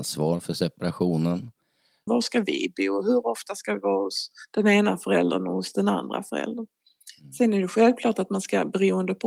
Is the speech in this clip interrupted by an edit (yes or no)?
yes